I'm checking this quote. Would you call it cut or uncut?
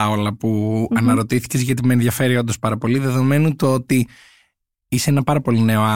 uncut